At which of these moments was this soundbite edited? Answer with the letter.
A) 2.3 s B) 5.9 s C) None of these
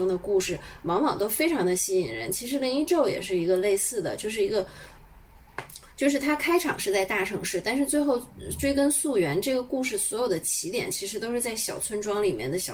C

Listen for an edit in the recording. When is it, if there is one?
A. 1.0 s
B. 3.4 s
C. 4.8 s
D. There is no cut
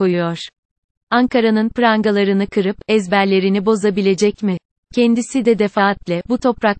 A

